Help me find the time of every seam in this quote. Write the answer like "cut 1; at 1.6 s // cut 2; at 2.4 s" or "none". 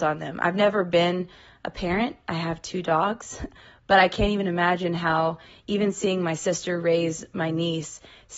none